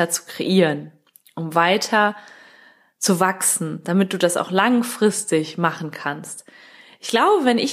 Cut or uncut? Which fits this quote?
uncut